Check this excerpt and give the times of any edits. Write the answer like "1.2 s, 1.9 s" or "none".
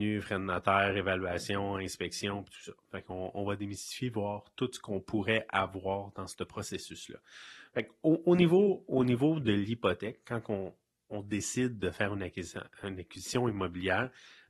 none